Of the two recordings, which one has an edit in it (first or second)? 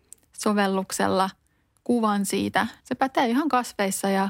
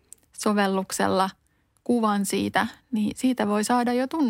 first